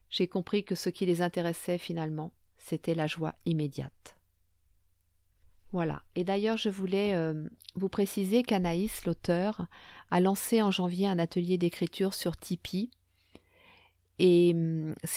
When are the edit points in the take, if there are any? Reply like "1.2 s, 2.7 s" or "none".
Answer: none